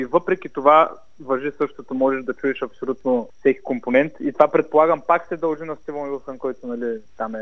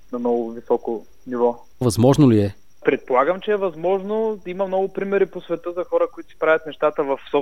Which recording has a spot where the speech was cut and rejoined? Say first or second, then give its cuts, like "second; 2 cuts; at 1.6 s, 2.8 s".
second; 1 cut; at 1.8 s